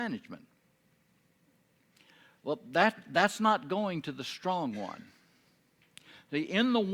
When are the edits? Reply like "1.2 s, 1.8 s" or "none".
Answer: none

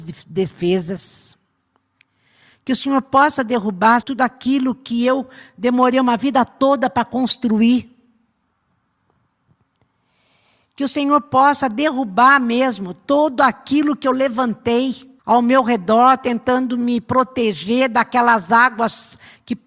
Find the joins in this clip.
4.0 s, 15.2 s

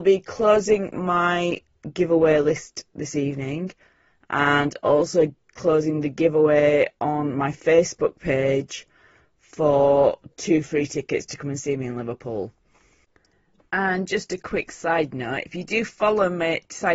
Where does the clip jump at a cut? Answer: none

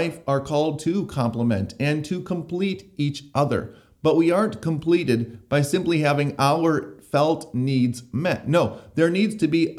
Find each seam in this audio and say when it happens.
none

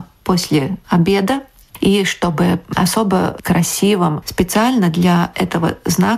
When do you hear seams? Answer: 1.7 s, 4.2 s

